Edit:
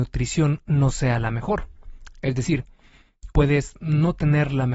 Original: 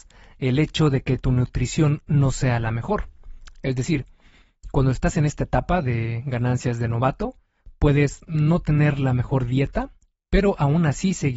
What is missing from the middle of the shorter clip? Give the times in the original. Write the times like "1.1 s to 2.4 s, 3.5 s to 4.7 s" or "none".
4.7 s to 7.8 s